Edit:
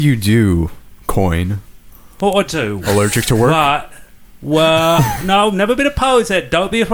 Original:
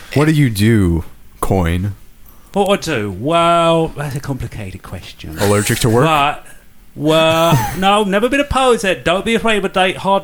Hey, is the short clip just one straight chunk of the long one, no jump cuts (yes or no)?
no